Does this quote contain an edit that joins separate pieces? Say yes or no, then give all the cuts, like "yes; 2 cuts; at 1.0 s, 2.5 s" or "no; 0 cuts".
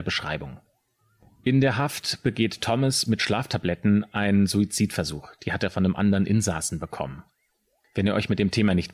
yes; 1 cut; at 7.8 s